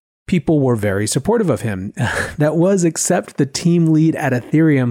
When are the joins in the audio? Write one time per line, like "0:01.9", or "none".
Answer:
none

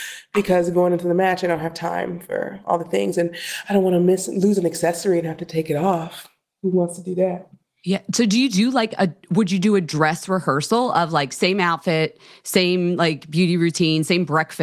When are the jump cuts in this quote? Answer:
none

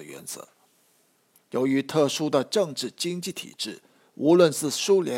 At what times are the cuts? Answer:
0:01.3

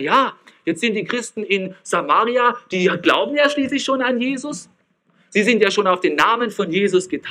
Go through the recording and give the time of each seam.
none

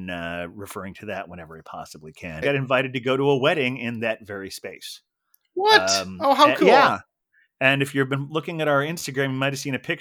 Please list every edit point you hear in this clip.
0:02.4

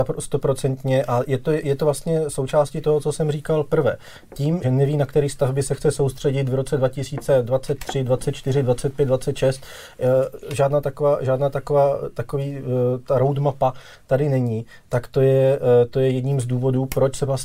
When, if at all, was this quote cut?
0:04.6

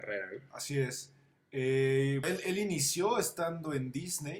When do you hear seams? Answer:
0:02.2

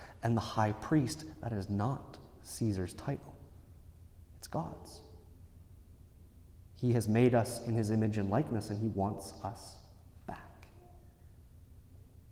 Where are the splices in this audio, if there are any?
0:06.5

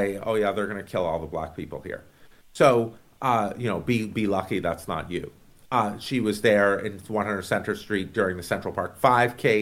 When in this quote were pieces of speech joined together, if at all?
none

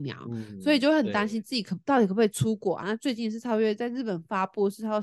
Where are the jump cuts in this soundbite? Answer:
0:02.8

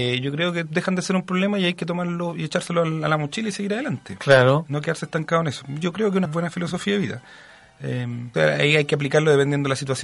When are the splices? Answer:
0:06.2
0:08.3

